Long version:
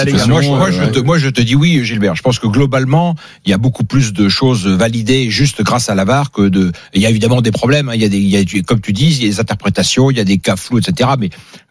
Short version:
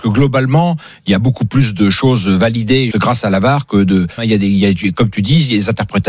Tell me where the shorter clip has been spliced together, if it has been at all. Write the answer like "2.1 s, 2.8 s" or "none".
2.9 s, 4.2 s